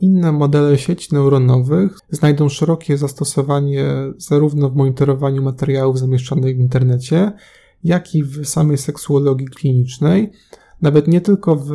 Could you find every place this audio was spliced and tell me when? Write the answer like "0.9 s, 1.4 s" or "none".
none